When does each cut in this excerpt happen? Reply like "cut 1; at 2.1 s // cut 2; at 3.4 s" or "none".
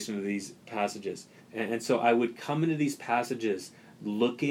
cut 1; at 1.4 s

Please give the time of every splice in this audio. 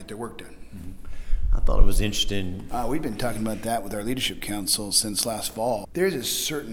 cut 1; at 2.7 s

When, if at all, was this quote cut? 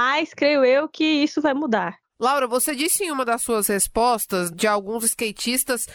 cut 1; at 2.0 s // cut 2; at 4.5 s

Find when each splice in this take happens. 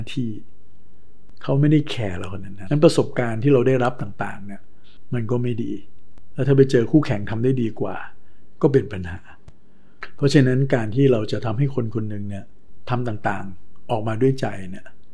cut 1; at 2.7 s

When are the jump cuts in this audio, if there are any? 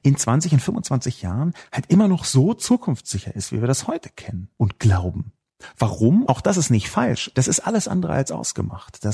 cut 1; at 4.5 s // cut 2; at 6.2 s // cut 3; at 7.3 s

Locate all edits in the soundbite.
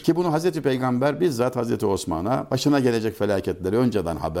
none

